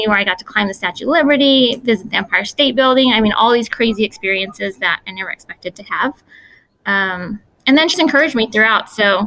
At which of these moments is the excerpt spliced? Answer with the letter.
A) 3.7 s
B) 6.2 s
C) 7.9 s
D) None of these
C